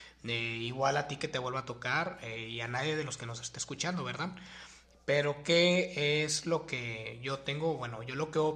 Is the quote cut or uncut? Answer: uncut